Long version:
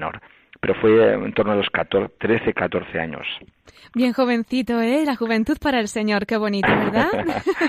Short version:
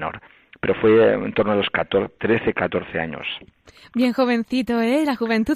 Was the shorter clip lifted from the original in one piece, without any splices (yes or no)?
yes